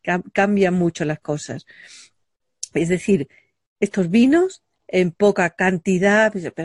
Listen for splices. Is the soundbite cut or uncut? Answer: uncut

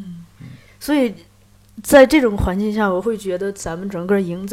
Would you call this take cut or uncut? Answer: uncut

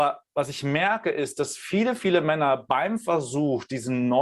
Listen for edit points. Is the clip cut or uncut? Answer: uncut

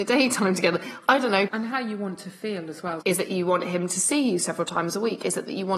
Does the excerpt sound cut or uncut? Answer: cut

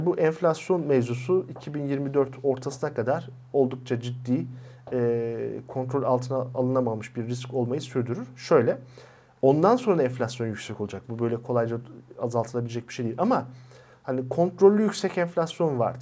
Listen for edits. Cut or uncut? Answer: uncut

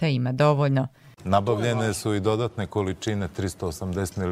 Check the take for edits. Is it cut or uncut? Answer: cut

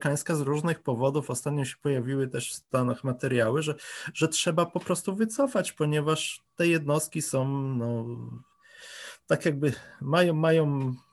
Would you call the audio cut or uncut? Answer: uncut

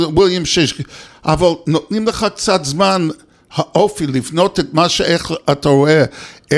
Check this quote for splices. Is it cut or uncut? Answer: cut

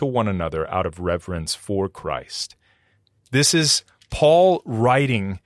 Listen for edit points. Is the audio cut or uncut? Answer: cut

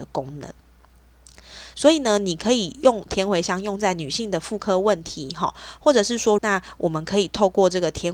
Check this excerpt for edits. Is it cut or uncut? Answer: cut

